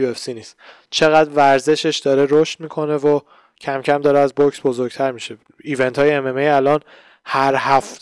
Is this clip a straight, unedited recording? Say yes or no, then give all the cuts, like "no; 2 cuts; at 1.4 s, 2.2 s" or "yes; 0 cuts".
yes; 0 cuts